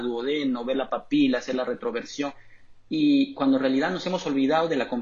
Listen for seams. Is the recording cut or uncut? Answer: uncut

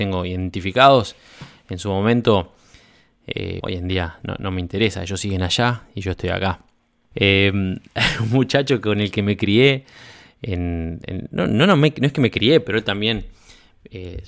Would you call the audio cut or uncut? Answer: cut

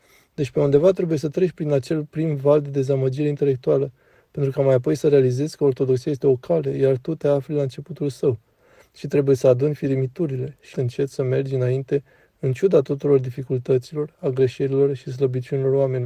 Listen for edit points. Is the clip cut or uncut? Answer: cut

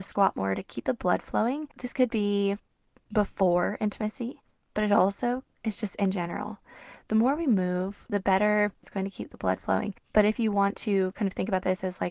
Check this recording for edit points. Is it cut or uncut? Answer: uncut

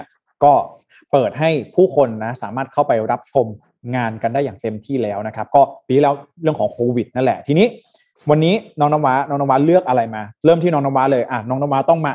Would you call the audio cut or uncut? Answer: uncut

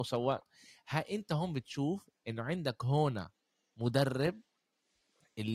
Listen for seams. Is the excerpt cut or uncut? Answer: uncut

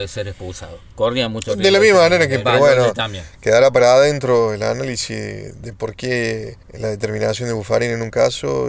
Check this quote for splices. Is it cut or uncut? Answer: cut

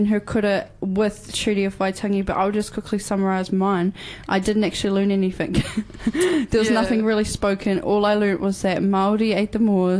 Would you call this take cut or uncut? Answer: uncut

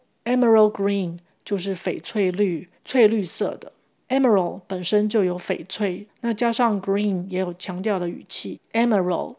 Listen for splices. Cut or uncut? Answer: cut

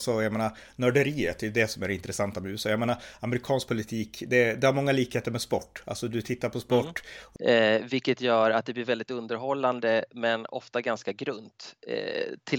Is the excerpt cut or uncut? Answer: cut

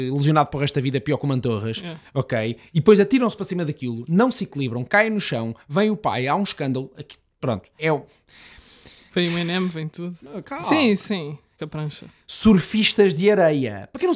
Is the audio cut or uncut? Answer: cut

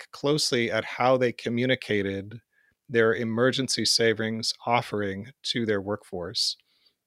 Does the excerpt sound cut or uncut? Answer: uncut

